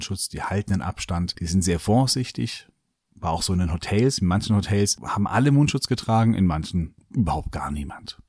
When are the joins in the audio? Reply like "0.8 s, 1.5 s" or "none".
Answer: none